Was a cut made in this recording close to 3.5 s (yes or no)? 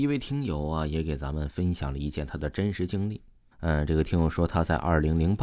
yes